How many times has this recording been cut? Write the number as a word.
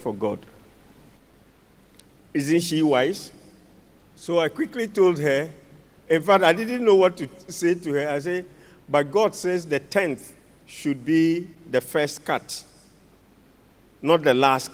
zero